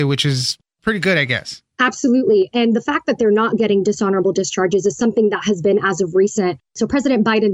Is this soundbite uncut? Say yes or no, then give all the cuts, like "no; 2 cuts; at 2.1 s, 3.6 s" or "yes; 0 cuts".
no; 1 cut; at 1.7 s